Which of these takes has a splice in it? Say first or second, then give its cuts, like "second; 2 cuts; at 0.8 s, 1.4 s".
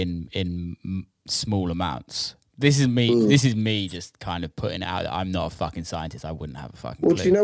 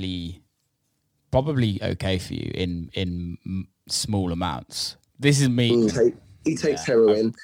second; 1 cut; at 5.9 s